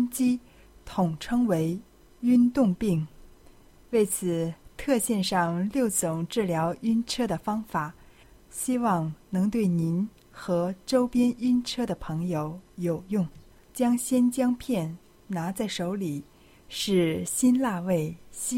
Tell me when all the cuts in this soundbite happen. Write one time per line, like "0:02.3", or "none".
0:13.6
0:16.6